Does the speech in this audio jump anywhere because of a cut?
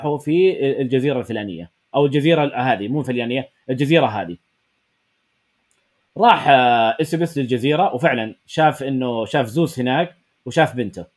no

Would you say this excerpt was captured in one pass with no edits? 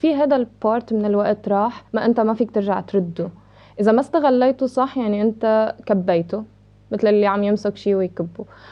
no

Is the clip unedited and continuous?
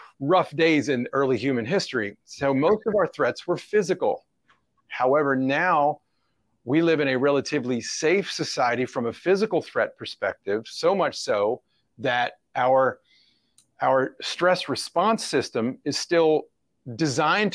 yes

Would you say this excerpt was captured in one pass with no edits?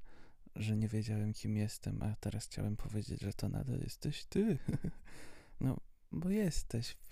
yes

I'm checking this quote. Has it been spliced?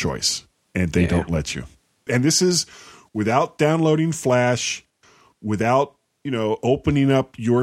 yes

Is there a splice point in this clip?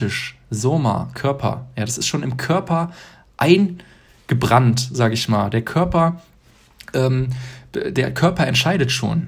no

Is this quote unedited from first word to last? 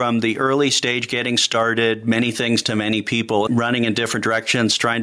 no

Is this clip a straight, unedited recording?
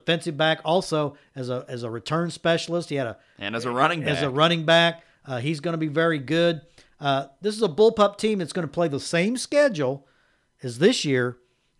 yes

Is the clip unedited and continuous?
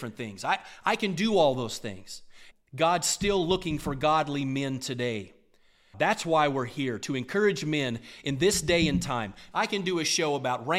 no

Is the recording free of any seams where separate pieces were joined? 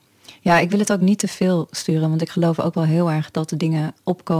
yes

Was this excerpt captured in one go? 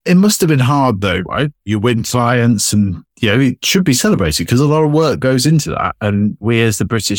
no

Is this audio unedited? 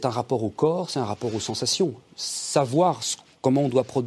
yes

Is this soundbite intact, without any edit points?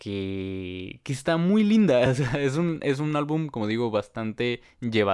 yes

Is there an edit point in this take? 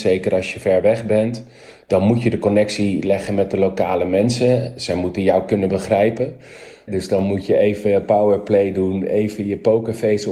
yes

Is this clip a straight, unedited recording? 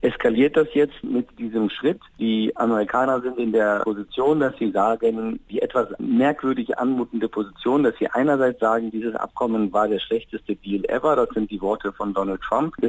yes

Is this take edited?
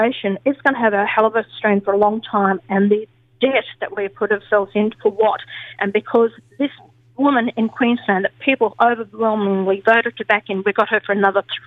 yes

